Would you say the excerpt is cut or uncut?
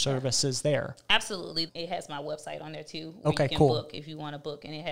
cut